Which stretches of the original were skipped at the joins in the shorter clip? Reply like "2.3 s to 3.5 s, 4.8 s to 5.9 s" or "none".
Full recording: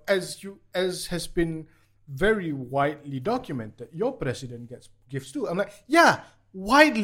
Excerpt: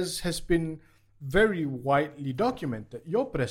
none